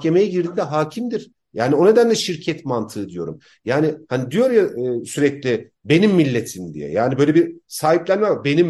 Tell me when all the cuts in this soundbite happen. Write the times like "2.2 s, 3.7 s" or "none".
1.5 s